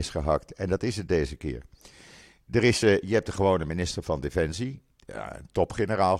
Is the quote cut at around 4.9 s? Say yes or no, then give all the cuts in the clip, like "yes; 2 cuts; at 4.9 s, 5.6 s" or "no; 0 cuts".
yes; 1 cut; at 4.9 s